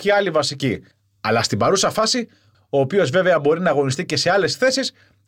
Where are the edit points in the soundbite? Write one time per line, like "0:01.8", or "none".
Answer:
0:02.5